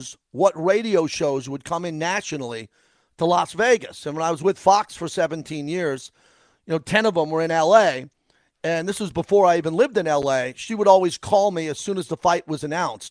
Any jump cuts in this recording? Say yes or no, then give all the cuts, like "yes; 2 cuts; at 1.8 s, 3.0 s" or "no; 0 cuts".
no; 0 cuts